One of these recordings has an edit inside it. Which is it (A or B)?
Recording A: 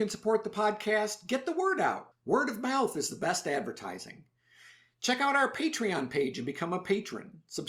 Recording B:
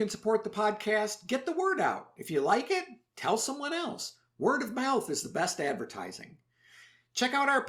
A